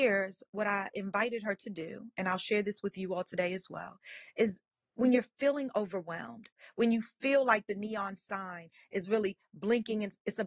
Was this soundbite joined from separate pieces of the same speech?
no; 0 cuts

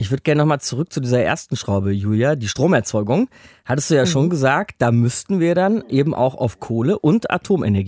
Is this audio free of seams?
yes; 0 cuts

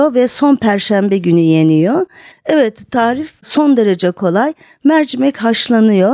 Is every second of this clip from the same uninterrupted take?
no; 1 cut; at 2.3 s

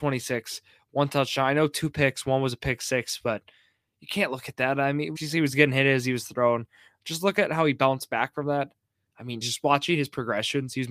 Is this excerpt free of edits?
no; 2 cuts; at 5.2 s, 9.4 s

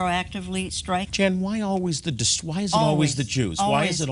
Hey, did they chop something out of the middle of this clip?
yes; 1 cut; at 1.1 s

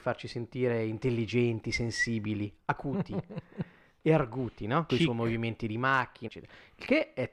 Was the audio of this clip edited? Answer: yes; 2 cuts; at 4.9 s, 6.3 s

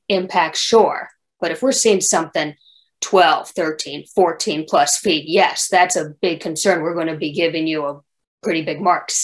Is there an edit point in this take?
yes; 1 cut; at 1.4 s

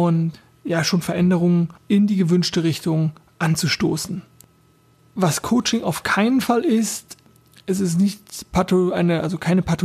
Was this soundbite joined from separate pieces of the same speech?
yes; 1 cut; at 1.8 s

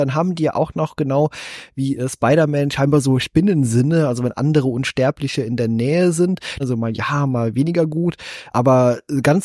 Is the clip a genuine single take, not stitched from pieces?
no; 2 cuts; at 6.6 s, 8.5 s

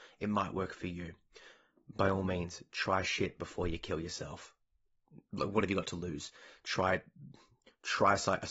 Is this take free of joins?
yes; 0 cuts

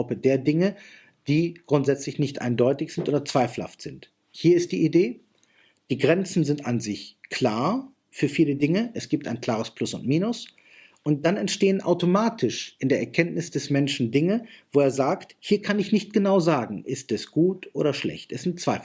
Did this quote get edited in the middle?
no; 0 cuts

